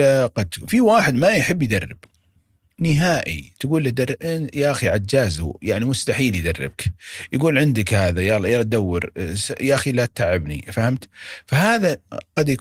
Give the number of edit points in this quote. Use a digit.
0